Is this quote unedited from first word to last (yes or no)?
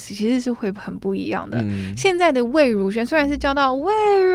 yes